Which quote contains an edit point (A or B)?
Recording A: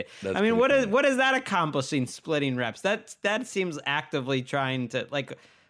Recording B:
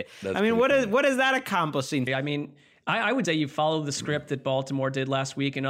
B